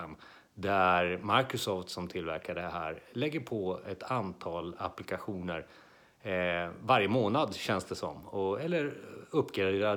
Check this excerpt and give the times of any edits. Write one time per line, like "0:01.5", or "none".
none